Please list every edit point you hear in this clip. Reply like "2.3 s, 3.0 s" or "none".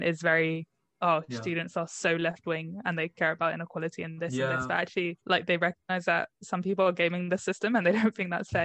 5.2 s